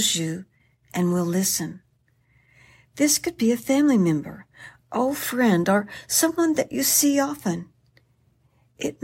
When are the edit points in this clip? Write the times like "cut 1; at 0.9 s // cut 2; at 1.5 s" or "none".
none